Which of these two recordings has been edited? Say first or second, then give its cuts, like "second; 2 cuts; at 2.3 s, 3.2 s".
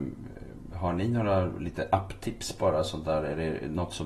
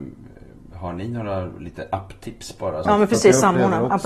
second; 1 cut; at 2.8 s